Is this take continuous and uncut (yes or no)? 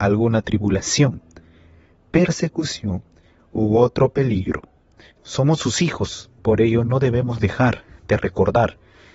no